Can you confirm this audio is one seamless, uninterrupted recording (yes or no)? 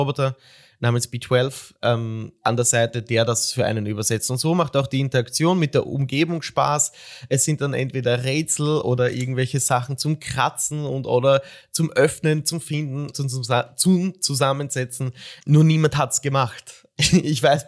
no